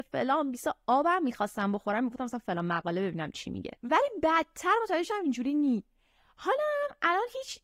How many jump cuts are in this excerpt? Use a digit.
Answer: 1